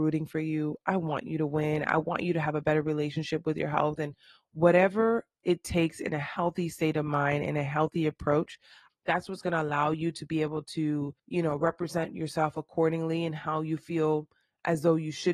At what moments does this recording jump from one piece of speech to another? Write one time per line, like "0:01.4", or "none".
0:08.9
0:11.2